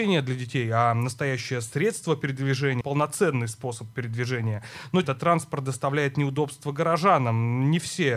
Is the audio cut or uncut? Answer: cut